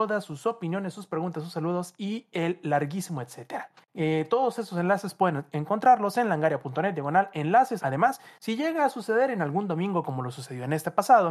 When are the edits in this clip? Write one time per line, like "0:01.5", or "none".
0:03.8
0:07.8